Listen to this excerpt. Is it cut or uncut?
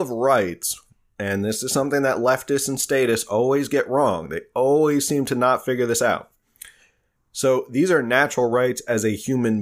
cut